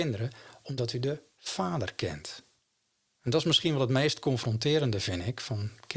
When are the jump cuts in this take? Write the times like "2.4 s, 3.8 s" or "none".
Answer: none